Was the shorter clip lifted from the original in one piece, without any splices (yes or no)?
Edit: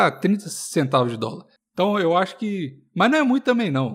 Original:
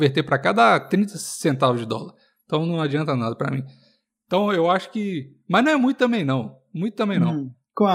no